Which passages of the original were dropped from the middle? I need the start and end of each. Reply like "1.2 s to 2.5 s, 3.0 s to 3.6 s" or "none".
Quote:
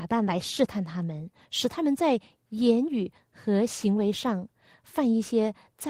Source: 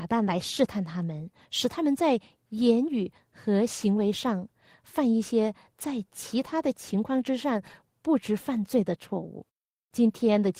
none